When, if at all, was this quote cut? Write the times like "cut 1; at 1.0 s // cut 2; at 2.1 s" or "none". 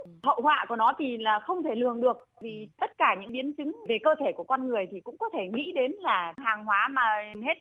none